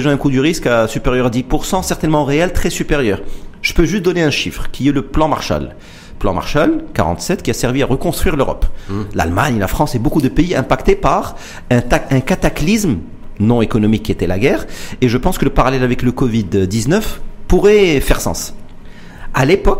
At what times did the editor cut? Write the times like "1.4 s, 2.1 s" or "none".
none

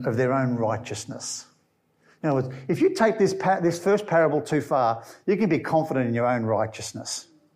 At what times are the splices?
none

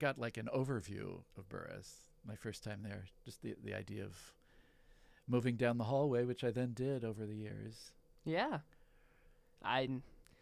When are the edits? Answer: none

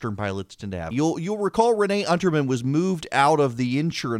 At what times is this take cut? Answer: 0.9 s

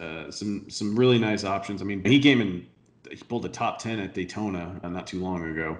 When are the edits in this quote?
2.0 s, 4.8 s

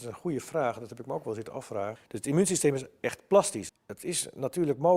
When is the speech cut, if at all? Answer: 2.0 s, 3.7 s

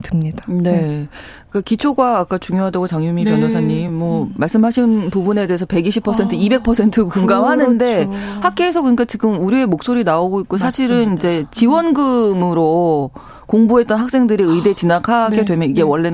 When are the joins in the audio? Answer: none

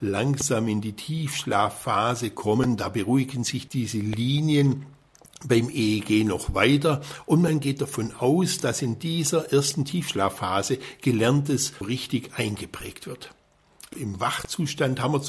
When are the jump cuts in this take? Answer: 3.7 s, 11.8 s, 13.9 s

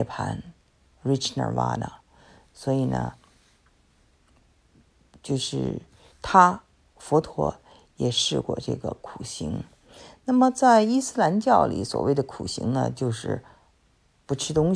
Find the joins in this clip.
none

